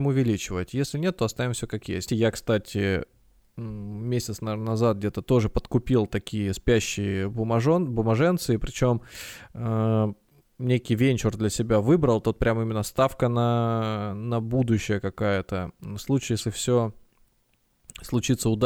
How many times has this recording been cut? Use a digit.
1